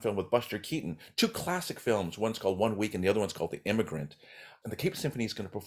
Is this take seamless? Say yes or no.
no